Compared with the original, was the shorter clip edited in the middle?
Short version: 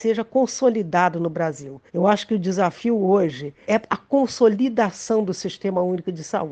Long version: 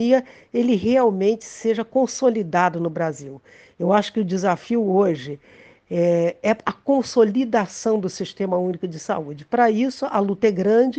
yes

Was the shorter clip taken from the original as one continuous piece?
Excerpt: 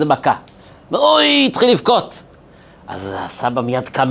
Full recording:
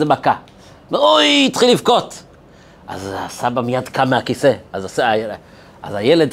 yes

